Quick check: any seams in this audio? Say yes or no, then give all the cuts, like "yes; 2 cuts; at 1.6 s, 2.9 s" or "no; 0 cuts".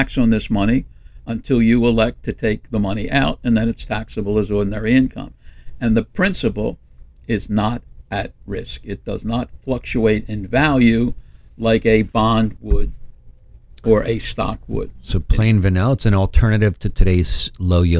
no; 0 cuts